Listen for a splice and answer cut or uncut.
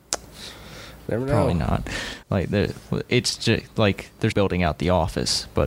cut